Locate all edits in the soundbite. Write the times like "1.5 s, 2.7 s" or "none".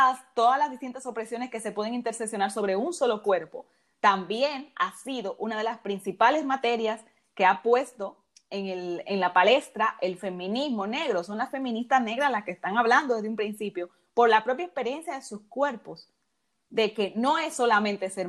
none